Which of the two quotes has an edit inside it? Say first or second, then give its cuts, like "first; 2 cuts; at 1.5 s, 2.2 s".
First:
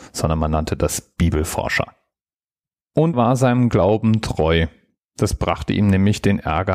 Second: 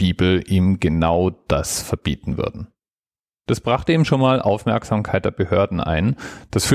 first; 1 cut; at 3.1 s